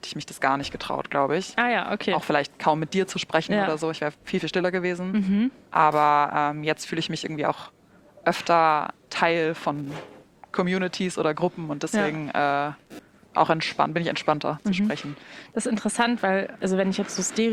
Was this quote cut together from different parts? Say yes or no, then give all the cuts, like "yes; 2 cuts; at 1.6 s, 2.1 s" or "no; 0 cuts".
no; 0 cuts